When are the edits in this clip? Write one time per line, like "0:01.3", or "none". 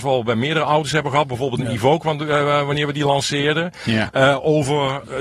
none